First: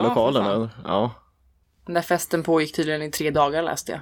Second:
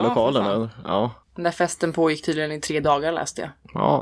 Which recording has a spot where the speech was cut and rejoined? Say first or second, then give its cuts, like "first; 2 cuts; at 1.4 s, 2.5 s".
second; 1 cut; at 1.2 s